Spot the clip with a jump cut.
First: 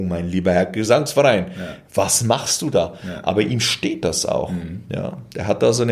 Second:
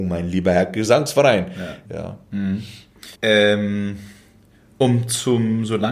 second; 2 cuts; at 1.9 s, 3.1 s

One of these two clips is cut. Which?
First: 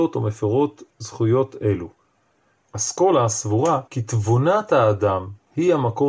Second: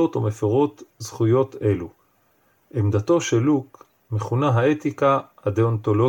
first; 2 cuts; at 2.6 s, 3.9 s

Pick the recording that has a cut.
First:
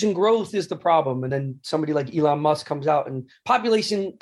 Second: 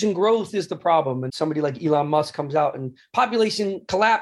second; 1 cut; at 1.3 s

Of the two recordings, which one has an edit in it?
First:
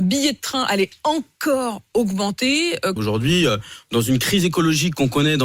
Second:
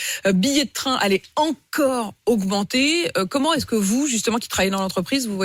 first; 1 cut; at 3.0 s

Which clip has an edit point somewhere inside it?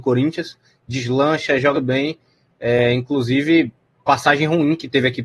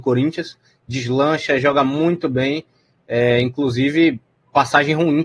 first; 1 cut; at 1.7 s

